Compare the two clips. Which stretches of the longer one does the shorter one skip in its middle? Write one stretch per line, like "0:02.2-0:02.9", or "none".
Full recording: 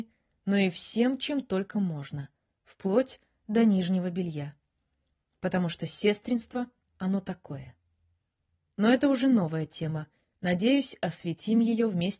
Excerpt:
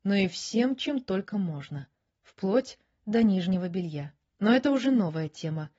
0:04.8-0:08.7